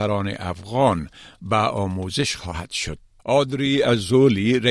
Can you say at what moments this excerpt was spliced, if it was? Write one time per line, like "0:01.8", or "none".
0:03.2